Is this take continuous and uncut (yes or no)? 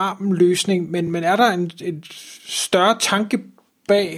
yes